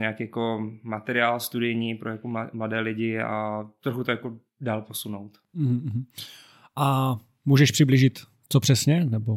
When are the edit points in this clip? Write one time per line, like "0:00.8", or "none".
none